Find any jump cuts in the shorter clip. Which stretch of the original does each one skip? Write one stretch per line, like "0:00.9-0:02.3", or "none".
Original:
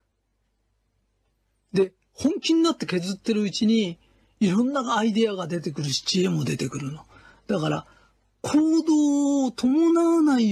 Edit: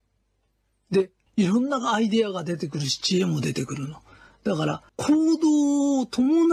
0:02.1-0:04.3
0:07.9-0:08.3

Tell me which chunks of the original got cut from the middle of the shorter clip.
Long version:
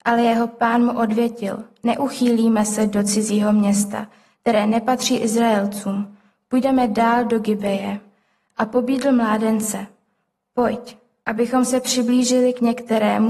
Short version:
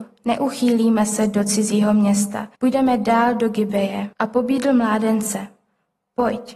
0:04.1-0:06.5
0:08.0-0:08.5

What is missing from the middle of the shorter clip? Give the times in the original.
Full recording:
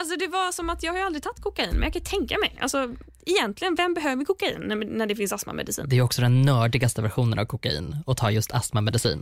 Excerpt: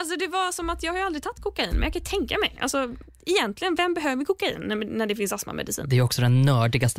none

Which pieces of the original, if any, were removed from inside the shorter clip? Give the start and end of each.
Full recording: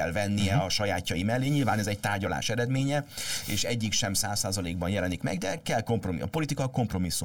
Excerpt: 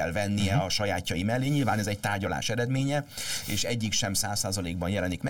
none

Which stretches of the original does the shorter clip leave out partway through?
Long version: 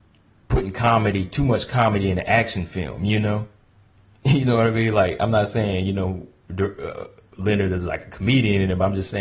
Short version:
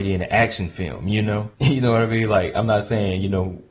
0:03.5-0:04.2

